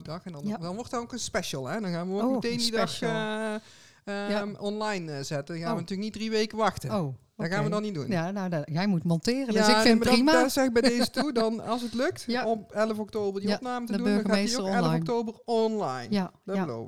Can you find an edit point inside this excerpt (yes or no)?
no